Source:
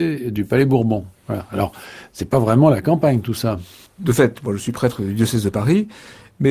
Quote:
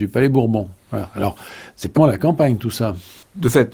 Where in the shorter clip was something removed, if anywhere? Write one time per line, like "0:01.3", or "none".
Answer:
0:02.0